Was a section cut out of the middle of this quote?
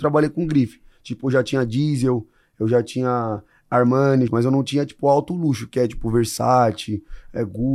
yes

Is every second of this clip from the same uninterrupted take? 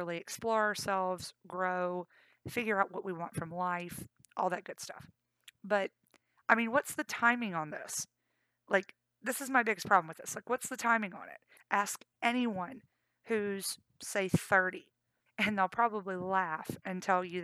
no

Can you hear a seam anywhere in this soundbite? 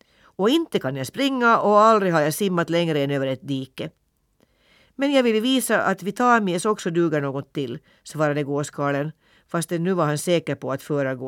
no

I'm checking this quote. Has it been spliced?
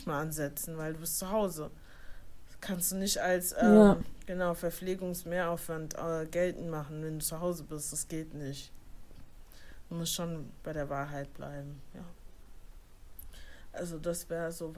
no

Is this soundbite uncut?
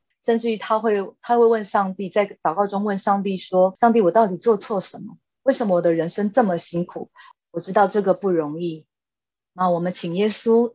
no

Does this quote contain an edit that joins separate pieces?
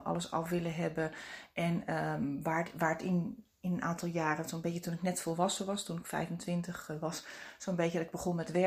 no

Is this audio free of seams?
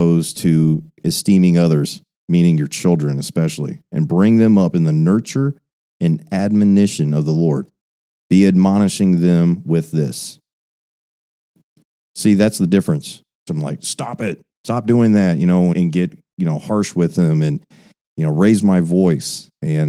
no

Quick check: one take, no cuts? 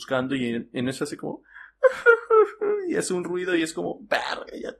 yes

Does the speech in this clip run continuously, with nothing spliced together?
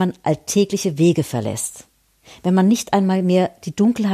yes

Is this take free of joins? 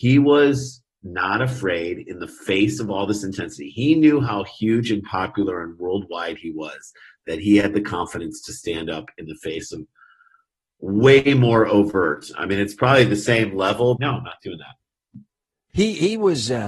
no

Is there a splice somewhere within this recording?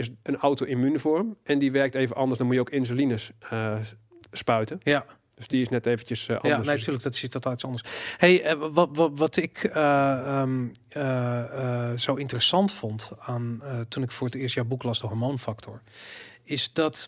no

